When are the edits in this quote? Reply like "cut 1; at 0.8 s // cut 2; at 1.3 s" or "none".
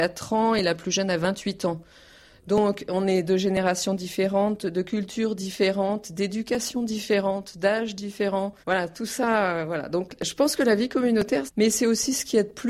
cut 1; at 8.6 s // cut 2; at 11.5 s